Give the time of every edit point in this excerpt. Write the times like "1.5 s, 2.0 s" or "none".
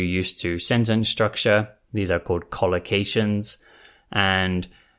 1.9 s